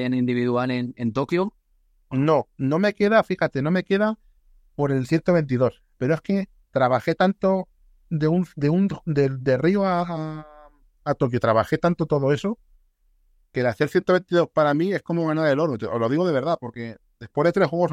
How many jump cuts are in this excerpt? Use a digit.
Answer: 1